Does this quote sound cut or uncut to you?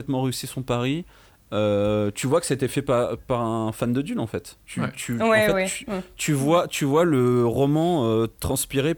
uncut